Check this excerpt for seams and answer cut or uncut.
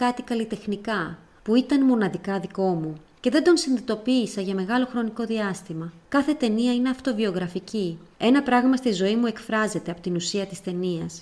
cut